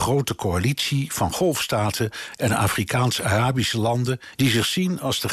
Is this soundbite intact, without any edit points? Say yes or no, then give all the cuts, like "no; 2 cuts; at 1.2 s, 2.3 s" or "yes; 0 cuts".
no; 1 cut; at 4.3 s